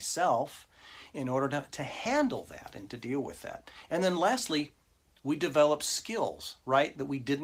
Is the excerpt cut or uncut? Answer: uncut